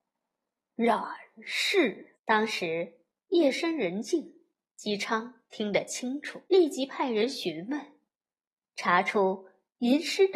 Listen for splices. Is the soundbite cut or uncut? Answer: cut